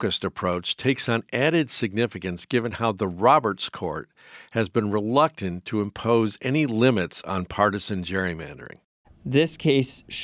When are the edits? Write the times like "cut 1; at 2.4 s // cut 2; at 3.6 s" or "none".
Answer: cut 1; at 9.0 s